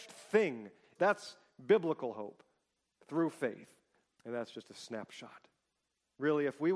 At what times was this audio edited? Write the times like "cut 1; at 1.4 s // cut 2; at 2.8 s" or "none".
cut 1; at 1.0 s // cut 2; at 4.2 s